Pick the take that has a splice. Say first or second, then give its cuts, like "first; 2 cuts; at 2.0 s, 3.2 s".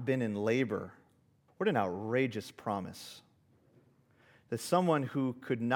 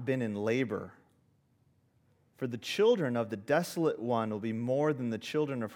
first; 1 cut; at 1.5 s